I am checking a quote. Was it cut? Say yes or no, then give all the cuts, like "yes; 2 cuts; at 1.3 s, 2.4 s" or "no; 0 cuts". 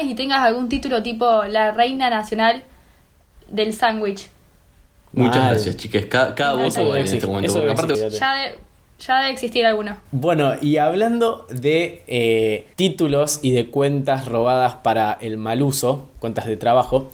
yes; 2 cuts; at 7.9 s, 12.7 s